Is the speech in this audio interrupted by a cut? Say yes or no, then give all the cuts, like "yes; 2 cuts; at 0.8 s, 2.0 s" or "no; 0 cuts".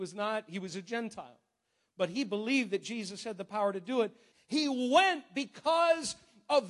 yes; 1 cut; at 4.3 s